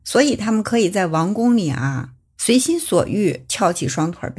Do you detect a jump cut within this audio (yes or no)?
no